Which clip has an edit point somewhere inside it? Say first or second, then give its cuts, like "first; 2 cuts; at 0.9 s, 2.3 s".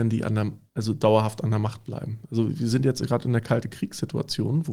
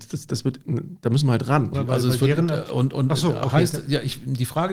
second; 1 cut; at 1.7 s